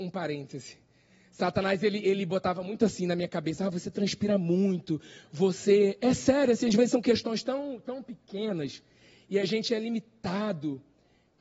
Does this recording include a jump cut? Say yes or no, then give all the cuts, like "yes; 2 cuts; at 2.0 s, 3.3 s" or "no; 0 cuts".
no; 0 cuts